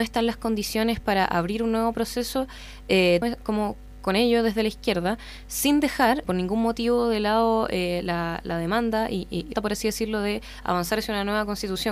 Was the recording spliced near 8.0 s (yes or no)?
no